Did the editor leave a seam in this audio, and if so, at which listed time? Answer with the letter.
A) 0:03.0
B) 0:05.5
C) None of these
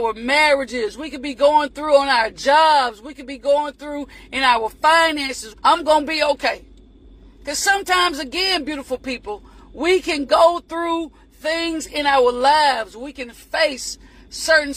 B